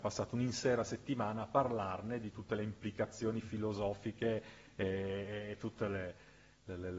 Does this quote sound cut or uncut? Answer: uncut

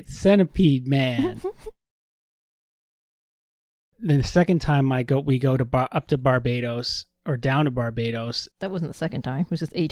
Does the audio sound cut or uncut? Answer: cut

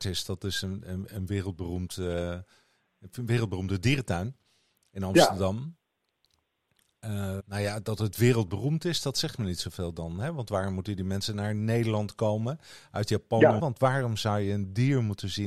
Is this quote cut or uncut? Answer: cut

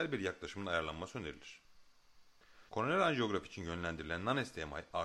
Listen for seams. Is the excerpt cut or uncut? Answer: cut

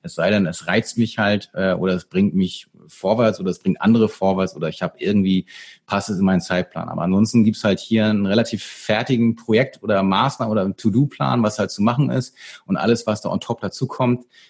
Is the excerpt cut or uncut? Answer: uncut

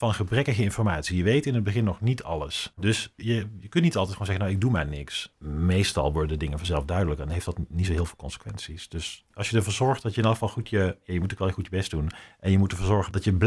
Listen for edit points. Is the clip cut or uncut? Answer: uncut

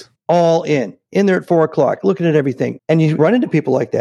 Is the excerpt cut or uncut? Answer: cut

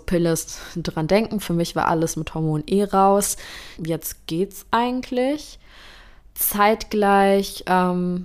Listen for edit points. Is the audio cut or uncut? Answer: cut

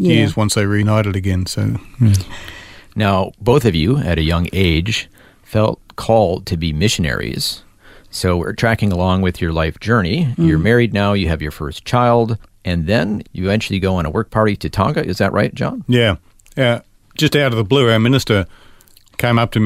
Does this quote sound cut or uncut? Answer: uncut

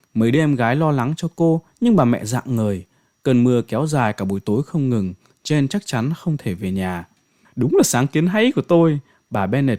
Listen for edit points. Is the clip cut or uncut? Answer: uncut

